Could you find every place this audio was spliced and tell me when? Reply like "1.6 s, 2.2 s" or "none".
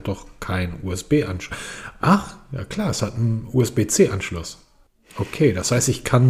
none